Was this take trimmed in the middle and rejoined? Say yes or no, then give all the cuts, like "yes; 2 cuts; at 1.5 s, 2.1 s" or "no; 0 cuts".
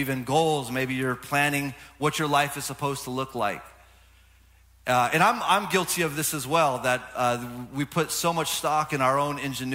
no; 0 cuts